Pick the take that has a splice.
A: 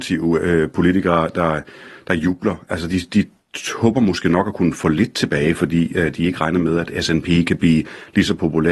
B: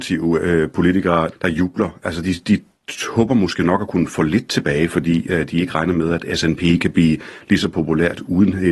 B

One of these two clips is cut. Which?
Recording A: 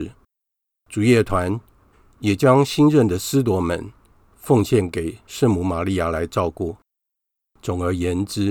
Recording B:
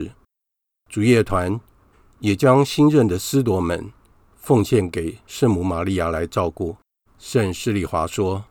B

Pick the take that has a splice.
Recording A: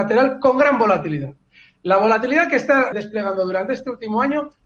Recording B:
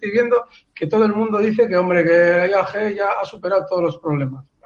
A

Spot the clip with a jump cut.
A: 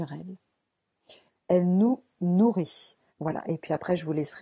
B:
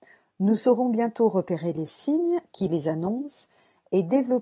A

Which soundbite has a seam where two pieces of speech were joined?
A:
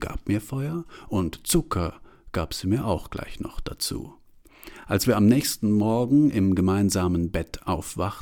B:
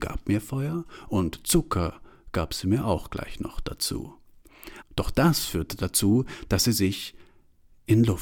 B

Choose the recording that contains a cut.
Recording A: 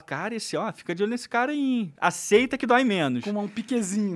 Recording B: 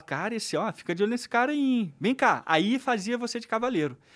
A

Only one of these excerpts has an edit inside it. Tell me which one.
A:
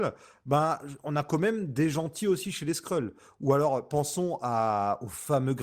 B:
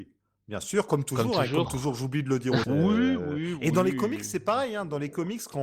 B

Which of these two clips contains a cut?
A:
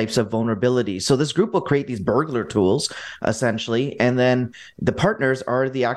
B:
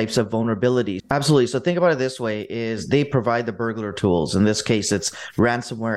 B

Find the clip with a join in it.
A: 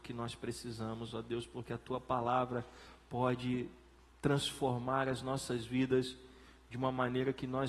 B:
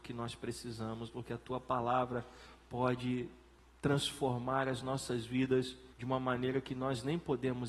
B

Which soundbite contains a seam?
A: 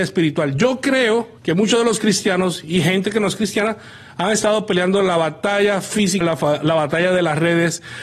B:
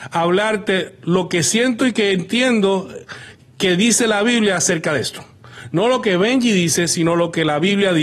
A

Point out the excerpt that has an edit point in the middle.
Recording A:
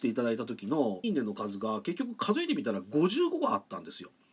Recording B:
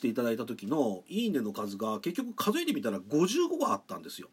A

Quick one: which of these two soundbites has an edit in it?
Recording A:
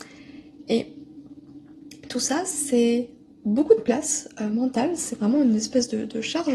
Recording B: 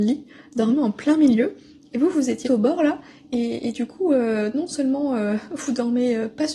B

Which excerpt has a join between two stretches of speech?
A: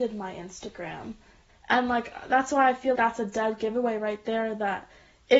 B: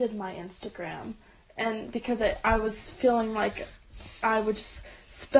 A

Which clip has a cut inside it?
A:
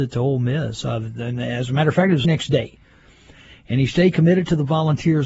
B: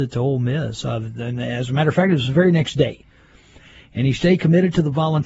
A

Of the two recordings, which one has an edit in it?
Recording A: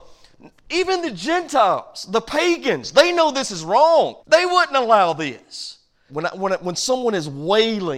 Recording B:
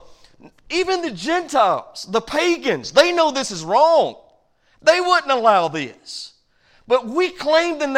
A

